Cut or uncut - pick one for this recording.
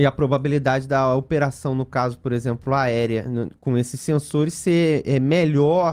uncut